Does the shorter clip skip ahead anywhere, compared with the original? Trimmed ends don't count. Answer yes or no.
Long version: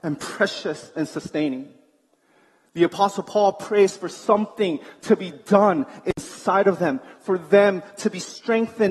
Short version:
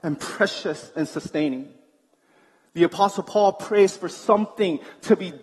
no